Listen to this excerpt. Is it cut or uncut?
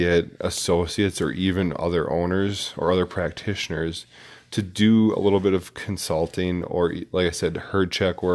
uncut